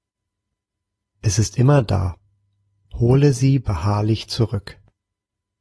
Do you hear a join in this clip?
yes; 2 cuts; at 1.1 s, 2.8 s

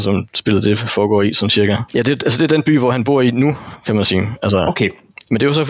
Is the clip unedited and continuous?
no; 1 cut; at 1.9 s

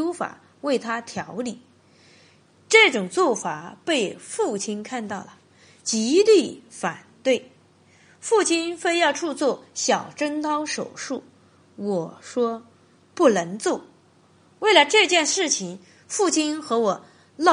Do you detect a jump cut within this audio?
no; 0 cuts

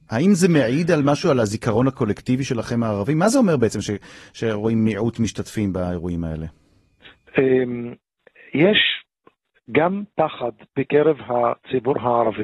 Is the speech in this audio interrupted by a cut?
no; 0 cuts

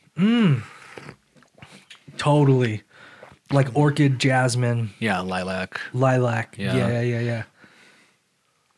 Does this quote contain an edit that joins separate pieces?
no; 0 cuts

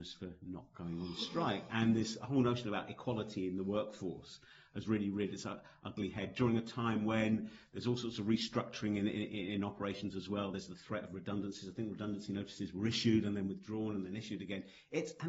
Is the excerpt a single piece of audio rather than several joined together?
yes; 0 cuts

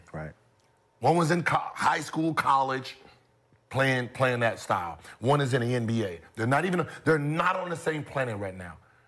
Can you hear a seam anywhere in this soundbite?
no; 0 cuts

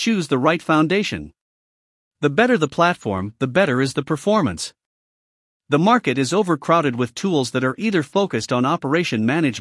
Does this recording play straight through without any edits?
yes; 0 cuts

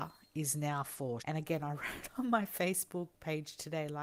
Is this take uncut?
no; 1 cut; at 1.2 s

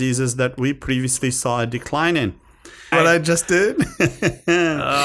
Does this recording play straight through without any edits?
no; 1 cut; at 2.9 s

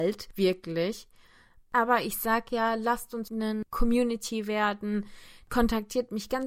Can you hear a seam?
no; 0 cuts

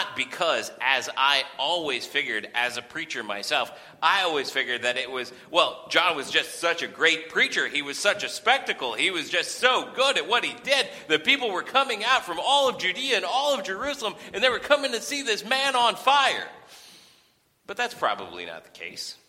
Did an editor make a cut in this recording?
no; 0 cuts

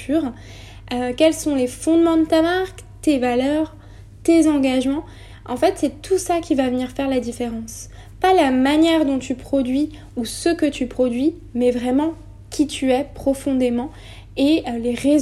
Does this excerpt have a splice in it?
no; 0 cuts

